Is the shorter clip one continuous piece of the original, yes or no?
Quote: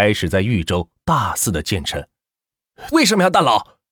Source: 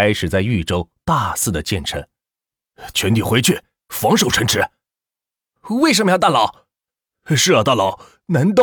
no